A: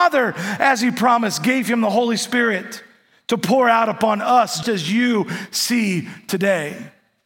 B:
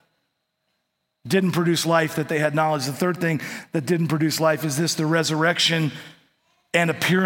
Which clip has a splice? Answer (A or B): A